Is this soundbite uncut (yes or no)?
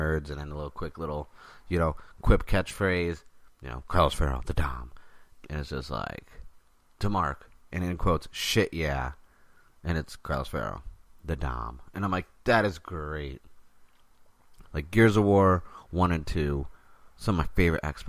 no